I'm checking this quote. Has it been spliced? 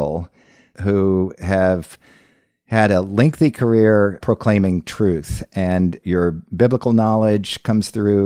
no; 0 cuts

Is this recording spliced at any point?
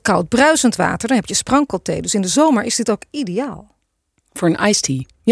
no; 0 cuts

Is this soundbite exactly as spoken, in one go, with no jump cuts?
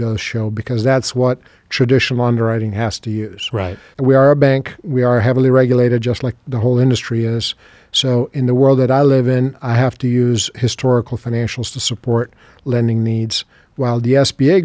yes; 0 cuts

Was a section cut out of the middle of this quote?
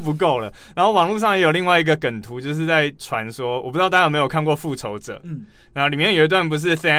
no; 0 cuts

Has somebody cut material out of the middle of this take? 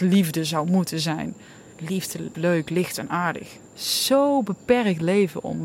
yes; 2 cuts; at 2.3 s, 3.7 s

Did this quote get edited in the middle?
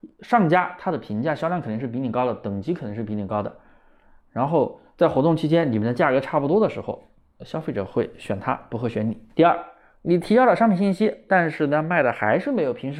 yes; 2 cuts; at 9.3 s, 11.3 s

